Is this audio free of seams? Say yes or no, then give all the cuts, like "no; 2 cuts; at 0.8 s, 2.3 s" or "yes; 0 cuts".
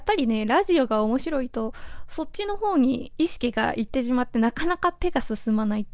yes; 0 cuts